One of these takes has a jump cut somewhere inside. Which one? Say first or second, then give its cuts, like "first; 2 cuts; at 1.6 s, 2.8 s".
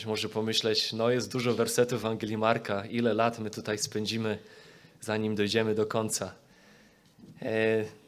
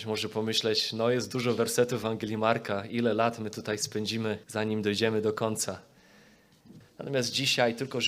second; 2 cuts; at 4.4 s, 6.8 s